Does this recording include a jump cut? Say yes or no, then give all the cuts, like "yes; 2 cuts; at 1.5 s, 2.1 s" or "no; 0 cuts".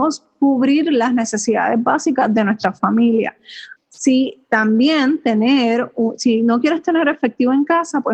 yes; 1 cut; at 3.8 s